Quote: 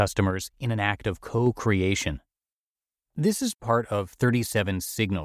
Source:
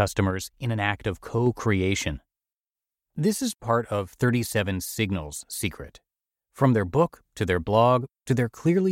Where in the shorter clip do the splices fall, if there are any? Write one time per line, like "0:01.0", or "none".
none